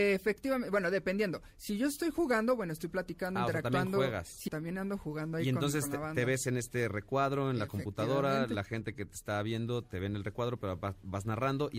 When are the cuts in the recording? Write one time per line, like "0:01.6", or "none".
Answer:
0:04.5